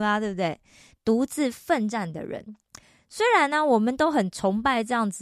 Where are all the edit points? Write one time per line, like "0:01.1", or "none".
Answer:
0:00.9

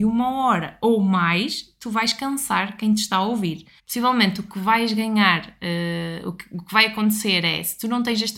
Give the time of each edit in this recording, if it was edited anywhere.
0:03.8

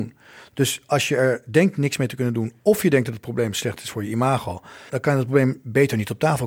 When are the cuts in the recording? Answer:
0:04.9

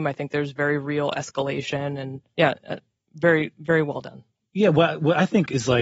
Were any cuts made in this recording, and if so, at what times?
none

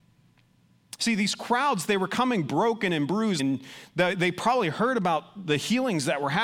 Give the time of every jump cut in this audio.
0:03.4

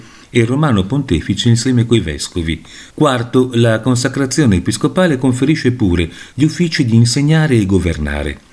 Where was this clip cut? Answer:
0:02.9
0:06.3

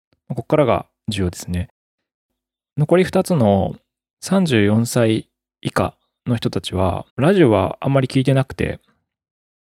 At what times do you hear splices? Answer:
0:07.1

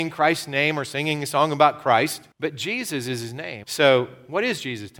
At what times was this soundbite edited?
0:02.3
0:03.6

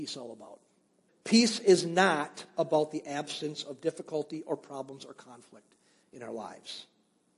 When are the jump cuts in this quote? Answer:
0:01.1

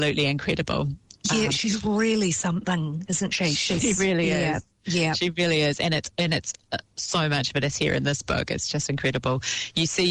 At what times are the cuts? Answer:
none

